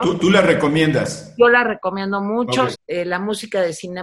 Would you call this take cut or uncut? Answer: cut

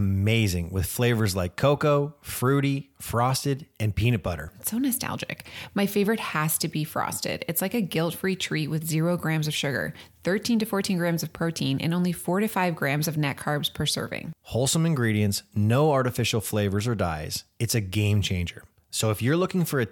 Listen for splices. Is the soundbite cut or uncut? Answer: uncut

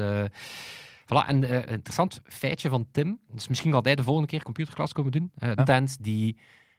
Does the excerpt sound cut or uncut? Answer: cut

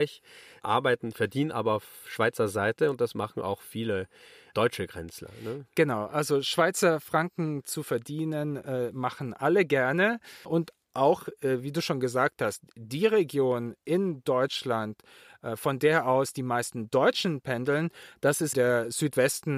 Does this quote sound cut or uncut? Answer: cut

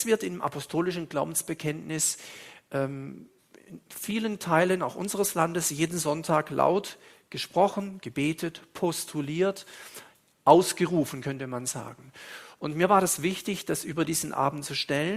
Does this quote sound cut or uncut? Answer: uncut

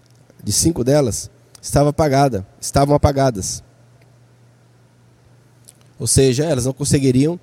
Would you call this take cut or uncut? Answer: uncut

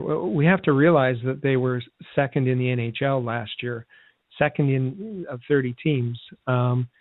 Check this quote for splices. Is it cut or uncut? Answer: uncut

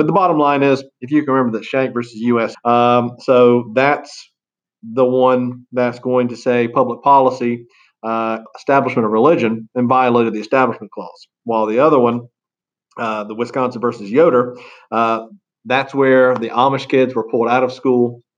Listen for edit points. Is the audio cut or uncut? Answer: cut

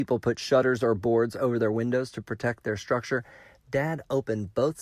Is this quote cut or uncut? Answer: uncut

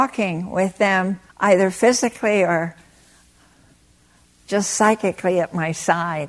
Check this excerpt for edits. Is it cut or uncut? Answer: cut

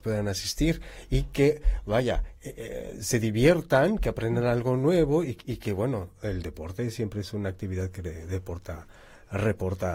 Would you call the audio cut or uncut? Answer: uncut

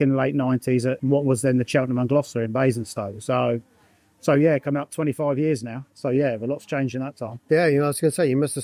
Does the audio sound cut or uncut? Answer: uncut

